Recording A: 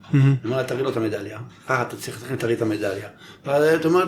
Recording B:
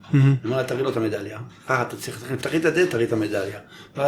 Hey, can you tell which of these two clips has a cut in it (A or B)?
A